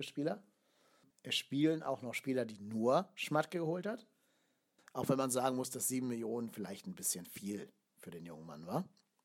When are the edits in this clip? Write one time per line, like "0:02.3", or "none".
0:04.8